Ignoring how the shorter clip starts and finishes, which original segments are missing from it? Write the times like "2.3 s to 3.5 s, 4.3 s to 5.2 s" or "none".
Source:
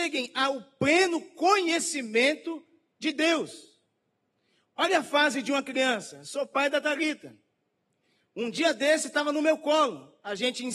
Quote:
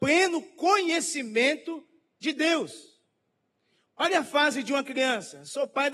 none